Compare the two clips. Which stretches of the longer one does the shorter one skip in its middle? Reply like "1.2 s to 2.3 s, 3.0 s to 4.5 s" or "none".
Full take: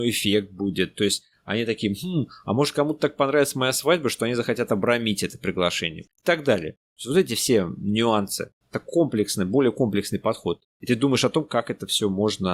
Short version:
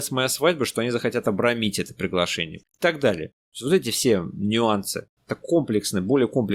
none